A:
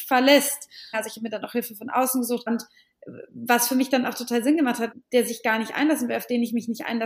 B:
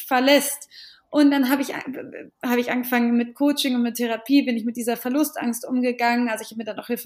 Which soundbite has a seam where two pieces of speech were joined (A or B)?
A